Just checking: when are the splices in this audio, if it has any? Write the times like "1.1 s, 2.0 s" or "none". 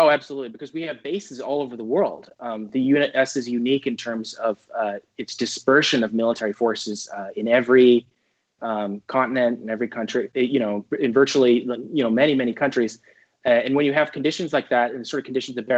none